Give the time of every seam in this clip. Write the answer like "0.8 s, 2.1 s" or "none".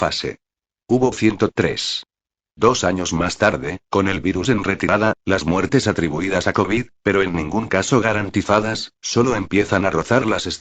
none